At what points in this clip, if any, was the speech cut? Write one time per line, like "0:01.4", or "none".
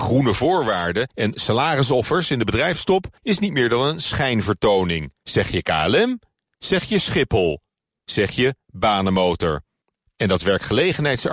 0:05.2